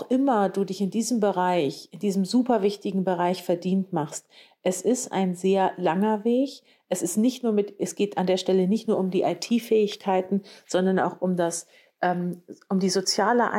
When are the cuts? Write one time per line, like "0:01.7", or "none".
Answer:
none